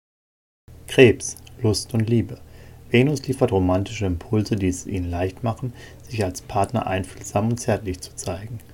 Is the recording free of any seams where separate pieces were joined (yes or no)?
yes